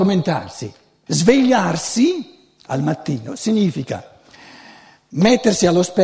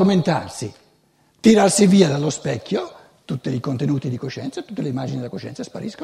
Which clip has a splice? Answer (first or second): first